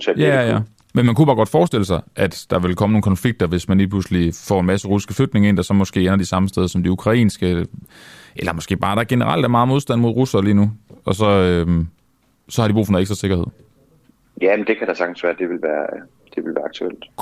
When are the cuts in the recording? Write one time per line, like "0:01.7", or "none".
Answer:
none